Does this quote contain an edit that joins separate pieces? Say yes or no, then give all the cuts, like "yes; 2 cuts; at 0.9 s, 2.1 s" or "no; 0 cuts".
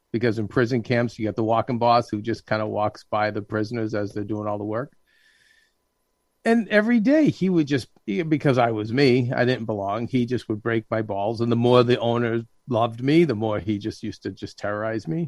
no; 0 cuts